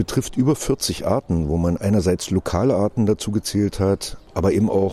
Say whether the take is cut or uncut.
cut